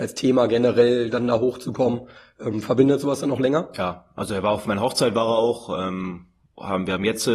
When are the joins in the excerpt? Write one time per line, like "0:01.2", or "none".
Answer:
none